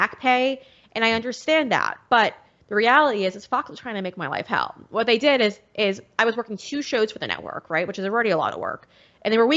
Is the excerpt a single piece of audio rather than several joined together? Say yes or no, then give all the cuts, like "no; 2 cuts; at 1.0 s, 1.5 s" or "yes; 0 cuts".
yes; 0 cuts